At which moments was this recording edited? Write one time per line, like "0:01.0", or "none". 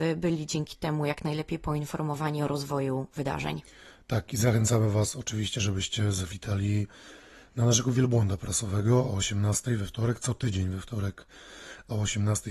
none